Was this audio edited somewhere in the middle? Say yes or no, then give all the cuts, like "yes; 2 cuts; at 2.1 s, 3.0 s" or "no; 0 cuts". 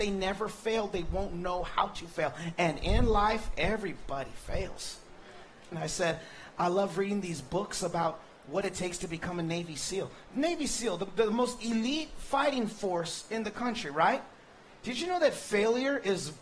yes; 1 cut; at 5.7 s